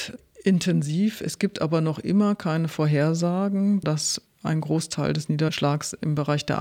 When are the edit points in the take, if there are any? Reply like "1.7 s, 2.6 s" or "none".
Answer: 3.8 s